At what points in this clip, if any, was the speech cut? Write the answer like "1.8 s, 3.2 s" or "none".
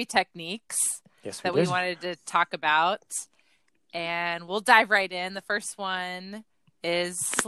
none

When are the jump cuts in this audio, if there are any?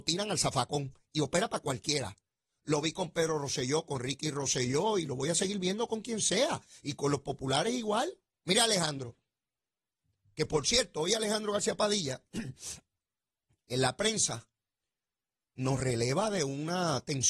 none

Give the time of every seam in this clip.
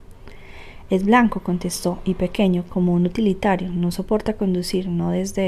none

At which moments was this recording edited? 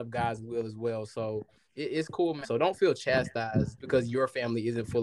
2.4 s, 3.8 s

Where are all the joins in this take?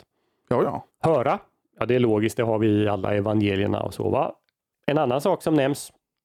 0.9 s, 4.7 s

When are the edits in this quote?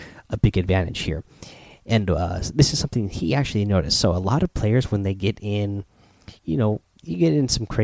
none

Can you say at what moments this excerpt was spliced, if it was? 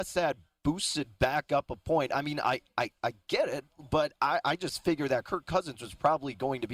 none

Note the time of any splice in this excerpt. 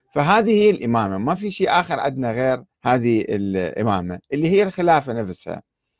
2.7 s

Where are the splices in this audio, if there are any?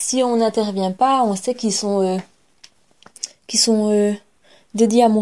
none

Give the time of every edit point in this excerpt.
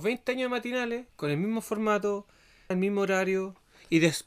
1.1 s, 2.7 s

